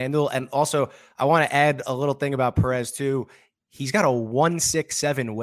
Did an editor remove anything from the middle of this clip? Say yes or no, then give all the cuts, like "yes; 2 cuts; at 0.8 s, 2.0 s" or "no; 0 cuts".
no; 0 cuts